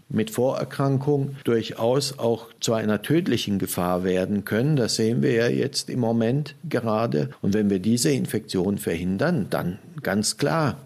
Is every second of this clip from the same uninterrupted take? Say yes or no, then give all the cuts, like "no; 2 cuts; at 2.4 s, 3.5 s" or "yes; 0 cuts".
yes; 0 cuts